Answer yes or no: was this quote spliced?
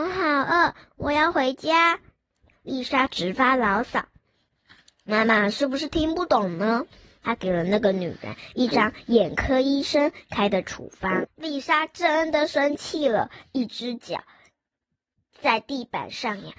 yes